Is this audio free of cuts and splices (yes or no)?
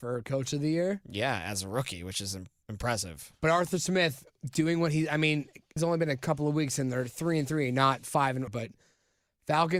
no